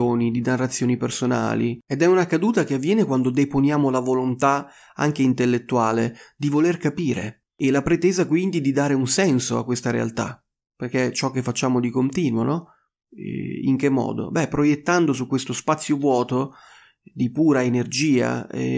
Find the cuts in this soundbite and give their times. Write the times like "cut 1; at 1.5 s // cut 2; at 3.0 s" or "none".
none